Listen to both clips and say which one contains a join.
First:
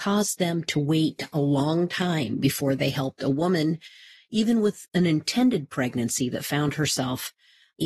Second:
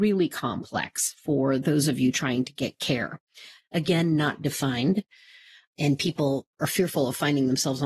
second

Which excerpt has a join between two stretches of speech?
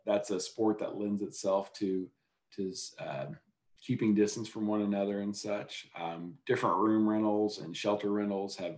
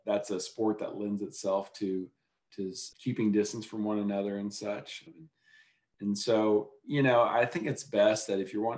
second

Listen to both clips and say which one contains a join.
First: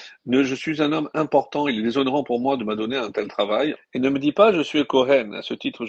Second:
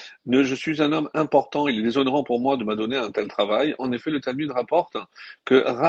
first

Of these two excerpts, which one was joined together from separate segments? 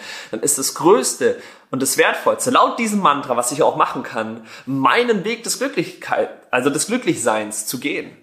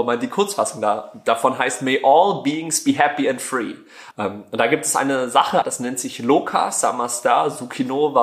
second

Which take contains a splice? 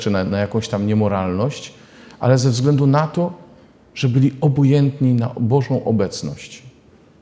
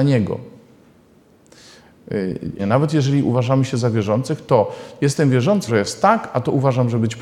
second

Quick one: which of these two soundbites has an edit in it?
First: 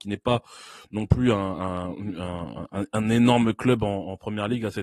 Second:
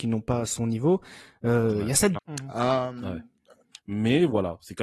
second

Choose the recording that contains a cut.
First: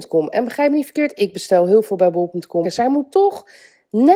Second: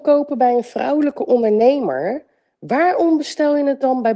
first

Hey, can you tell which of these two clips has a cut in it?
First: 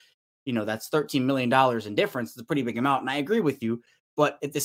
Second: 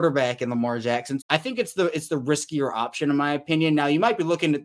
second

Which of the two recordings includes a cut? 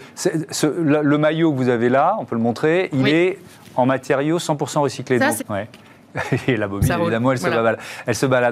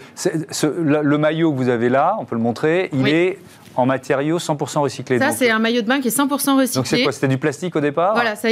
first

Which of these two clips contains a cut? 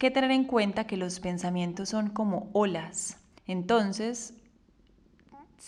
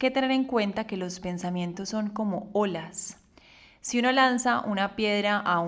first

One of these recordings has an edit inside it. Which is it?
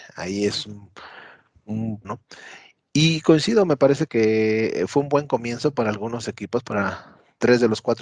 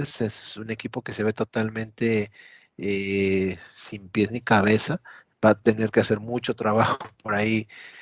first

